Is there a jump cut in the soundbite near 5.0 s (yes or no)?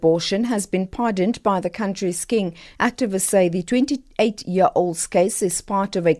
no